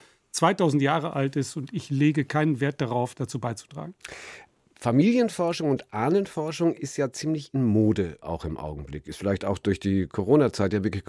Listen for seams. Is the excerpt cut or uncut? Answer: uncut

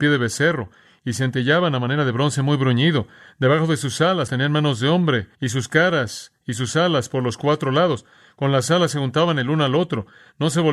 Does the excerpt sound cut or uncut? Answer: cut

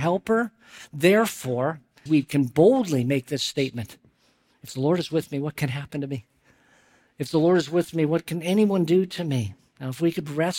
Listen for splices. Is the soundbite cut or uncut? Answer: cut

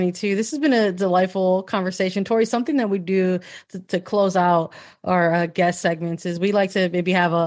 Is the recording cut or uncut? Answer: uncut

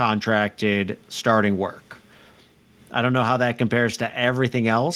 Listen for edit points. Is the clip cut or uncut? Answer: uncut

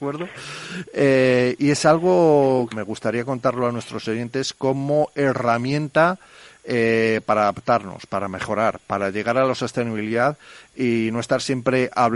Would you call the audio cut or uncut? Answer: cut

